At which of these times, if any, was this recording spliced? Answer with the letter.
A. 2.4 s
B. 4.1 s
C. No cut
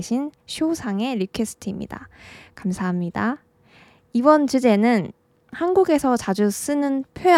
C